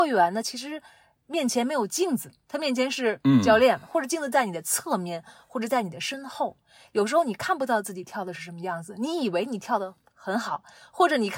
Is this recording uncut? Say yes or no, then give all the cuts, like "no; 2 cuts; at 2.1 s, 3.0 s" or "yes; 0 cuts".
yes; 0 cuts